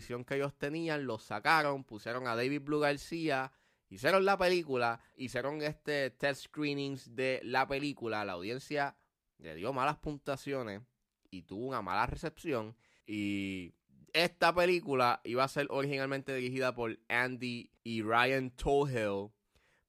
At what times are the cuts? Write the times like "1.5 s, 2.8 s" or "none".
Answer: 13.0 s, 17.8 s